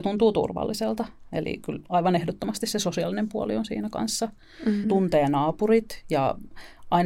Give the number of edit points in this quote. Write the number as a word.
one